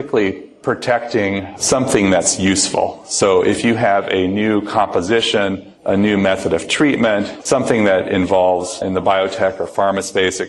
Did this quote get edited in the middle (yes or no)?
yes